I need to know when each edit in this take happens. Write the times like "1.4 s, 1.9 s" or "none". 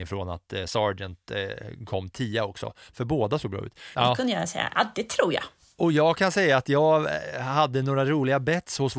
3.9 s